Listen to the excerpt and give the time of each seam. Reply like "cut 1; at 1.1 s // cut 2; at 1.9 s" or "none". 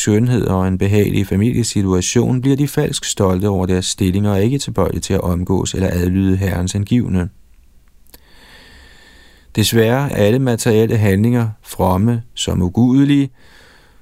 cut 1; at 10.1 s